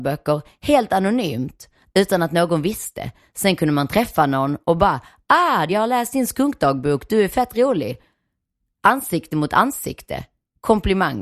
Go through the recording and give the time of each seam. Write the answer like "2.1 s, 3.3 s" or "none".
5.7 s